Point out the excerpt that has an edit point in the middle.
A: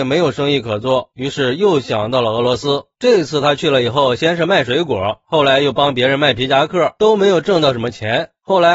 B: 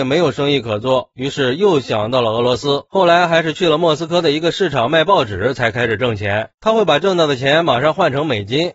B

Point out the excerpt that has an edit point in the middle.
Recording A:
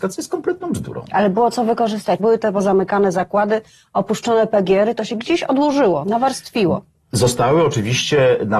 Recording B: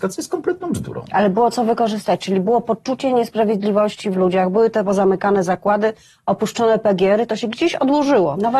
A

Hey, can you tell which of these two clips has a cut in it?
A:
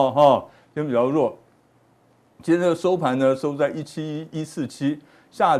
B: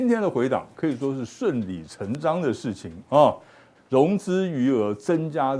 B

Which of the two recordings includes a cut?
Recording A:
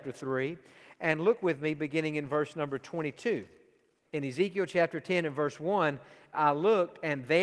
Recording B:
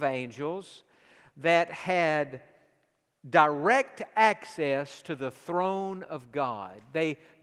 A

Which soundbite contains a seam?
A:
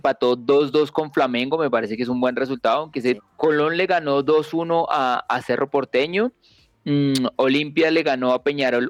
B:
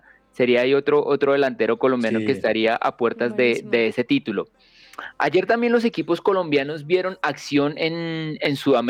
A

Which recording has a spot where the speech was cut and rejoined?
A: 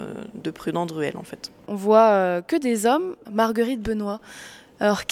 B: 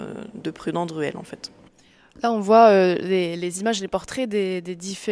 A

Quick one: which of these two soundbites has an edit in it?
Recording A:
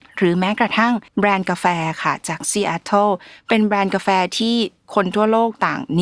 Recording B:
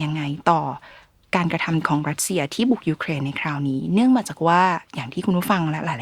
A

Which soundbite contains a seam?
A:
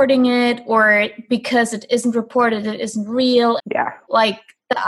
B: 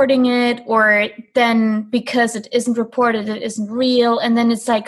A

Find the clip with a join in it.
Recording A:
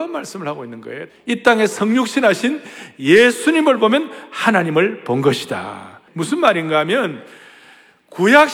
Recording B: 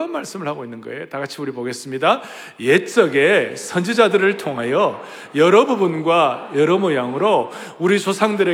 A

